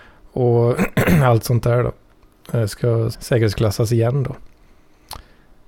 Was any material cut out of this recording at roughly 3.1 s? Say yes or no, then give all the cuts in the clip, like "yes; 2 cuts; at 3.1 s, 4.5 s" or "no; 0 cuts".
yes; 1 cut; at 3.1 s